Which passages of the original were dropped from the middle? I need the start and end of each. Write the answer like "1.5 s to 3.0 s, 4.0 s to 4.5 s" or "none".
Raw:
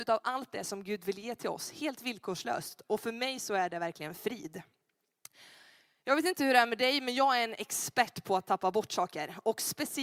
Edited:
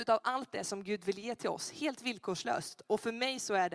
none